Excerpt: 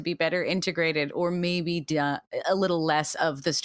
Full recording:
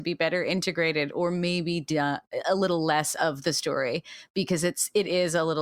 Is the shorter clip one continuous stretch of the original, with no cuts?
yes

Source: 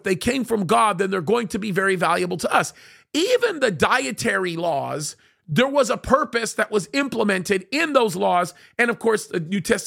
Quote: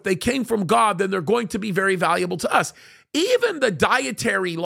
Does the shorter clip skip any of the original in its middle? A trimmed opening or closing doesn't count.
no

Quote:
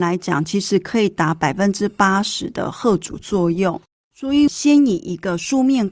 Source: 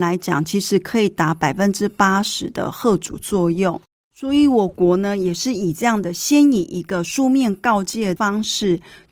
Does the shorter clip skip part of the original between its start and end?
yes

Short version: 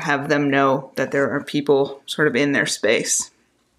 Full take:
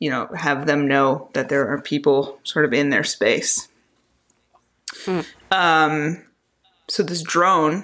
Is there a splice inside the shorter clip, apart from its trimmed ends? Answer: no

